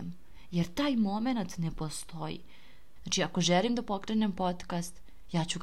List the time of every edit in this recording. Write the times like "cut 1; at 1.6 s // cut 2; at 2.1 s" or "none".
cut 1; at 3.0 s